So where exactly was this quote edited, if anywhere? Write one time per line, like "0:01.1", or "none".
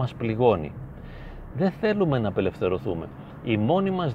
0:01.5